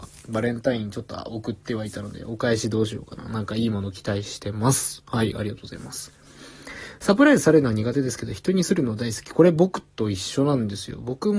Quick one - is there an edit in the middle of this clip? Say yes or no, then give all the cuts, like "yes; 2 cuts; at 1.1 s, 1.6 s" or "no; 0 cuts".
no; 0 cuts